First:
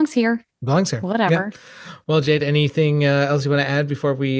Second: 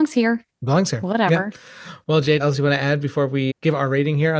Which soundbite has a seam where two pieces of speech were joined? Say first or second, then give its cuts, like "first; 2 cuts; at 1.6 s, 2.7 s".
second; 2 cuts; at 2.4 s, 3.5 s